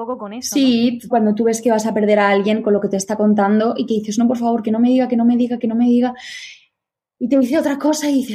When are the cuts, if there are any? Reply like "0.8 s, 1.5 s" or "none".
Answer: 1.1 s